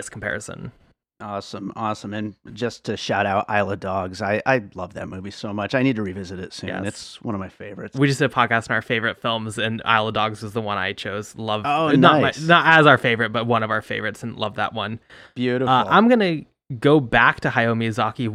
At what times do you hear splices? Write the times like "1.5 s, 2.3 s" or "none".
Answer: none